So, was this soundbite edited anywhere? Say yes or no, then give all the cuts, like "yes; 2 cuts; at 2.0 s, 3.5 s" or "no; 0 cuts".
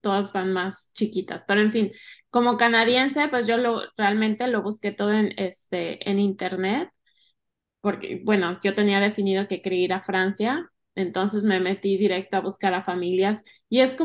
no; 0 cuts